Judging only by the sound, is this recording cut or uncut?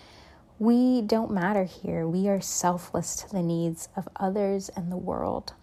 uncut